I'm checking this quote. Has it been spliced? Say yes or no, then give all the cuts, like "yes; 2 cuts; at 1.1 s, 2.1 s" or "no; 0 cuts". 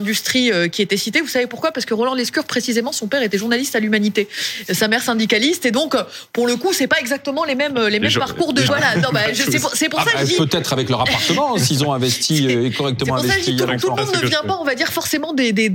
yes; 1 cut; at 8.7 s